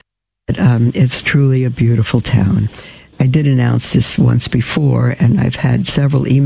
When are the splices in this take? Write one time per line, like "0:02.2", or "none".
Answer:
0:03.1